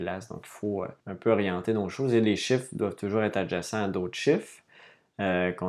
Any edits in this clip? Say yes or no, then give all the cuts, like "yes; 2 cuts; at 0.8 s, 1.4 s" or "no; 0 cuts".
yes; 1 cut; at 1.0 s